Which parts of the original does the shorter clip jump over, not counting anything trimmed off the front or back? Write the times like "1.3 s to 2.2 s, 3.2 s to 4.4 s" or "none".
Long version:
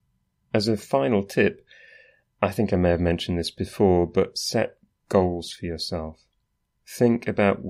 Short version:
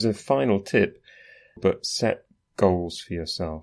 2.2 s to 4.1 s